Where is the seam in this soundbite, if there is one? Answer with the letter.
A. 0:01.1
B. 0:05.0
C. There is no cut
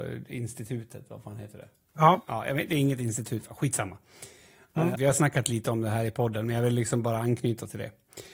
B